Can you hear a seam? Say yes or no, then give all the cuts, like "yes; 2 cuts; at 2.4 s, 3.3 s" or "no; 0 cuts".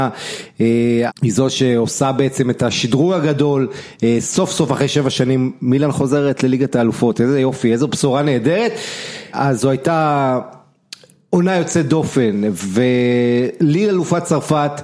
yes; 2 cuts; at 1.1 s, 9.3 s